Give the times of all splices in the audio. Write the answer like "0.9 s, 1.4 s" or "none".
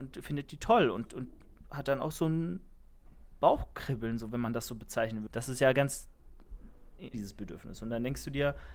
5.3 s, 7.1 s